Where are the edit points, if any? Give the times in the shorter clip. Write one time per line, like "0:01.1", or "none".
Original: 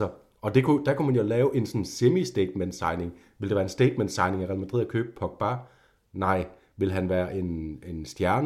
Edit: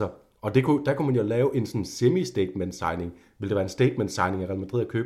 none